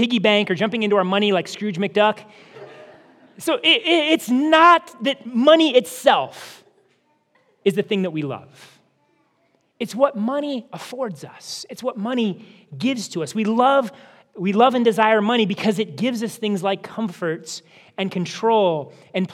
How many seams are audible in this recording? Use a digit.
1